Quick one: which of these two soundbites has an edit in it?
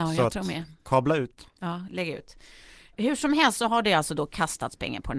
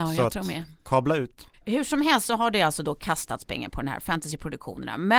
second; 1 cut; at 1.5 s

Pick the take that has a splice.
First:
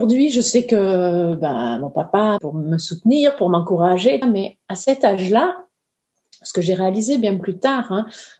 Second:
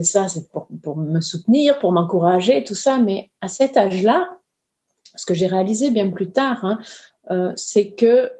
first; 2 cuts; at 2.4 s, 4.2 s

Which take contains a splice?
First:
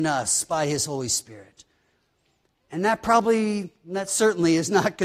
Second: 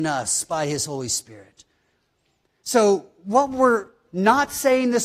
second; 1 cut; at 2.5 s

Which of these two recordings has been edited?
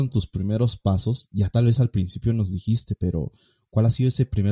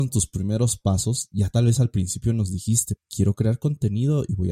second; 1 cut; at 3.0 s

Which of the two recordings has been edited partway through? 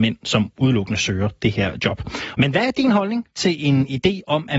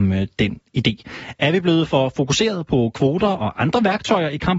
first; 1 cut; at 2.3 s

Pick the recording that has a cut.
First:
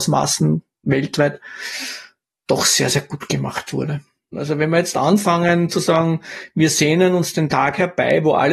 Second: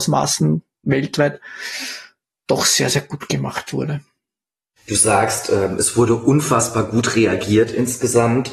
first; 1 cut; at 4.3 s

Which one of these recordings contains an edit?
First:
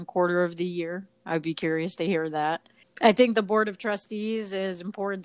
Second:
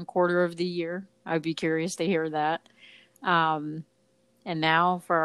first; 1 cut; at 2.8 s

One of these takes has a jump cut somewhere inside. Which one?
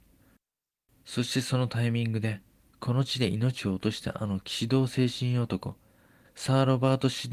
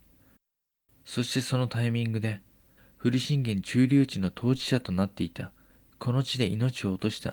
first; 2 cuts; at 2.6 s, 6.2 s

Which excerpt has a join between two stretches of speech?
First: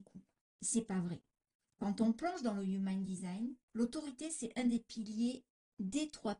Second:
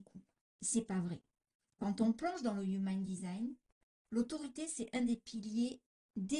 first; 1 cut; at 3.6 s

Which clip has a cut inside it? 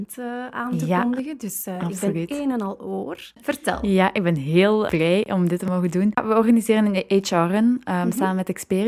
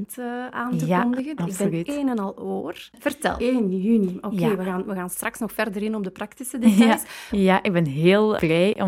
second; 3 cuts; at 1.4 s, 3.4 s, 7.3 s

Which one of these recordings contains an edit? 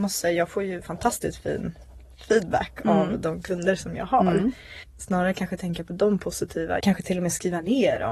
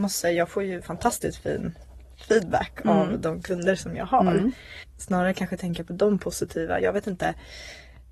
first; 1 cut; at 6.8 s

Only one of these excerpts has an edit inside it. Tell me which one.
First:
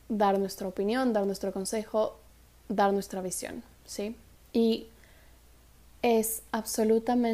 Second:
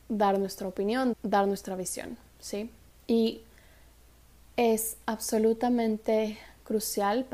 second; 1 cut; at 1.1 s

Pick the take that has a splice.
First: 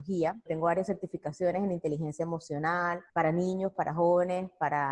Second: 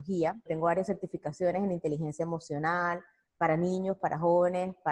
first; 1 cut; at 3.1 s

